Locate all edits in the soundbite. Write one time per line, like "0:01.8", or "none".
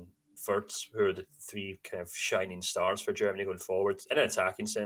none

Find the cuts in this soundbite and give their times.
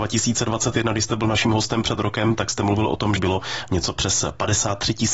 0:03.2

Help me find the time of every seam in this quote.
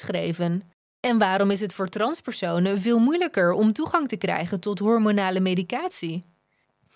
none

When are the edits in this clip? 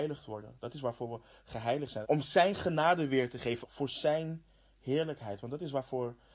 0:02.0
0:03.6

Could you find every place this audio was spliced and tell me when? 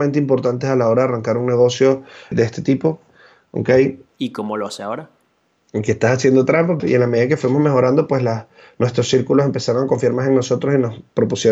0:02.3
0:04.1
0:06.8

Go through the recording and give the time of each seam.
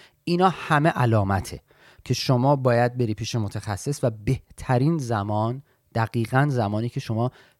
none

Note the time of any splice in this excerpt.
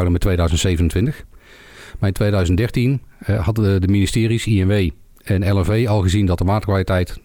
none

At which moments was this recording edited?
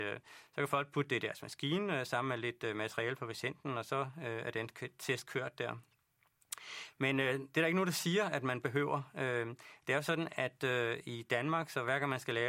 none

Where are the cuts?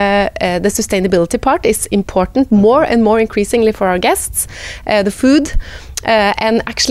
none

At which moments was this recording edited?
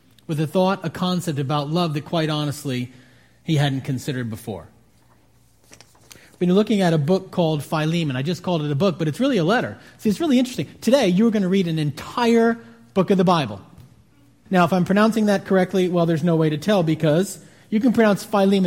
0:14.5

